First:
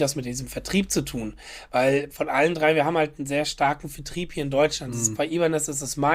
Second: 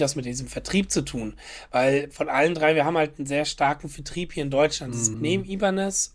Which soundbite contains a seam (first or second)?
second